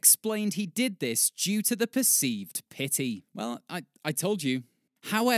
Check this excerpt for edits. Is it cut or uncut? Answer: uncut